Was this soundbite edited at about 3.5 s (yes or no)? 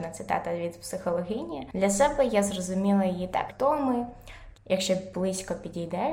yes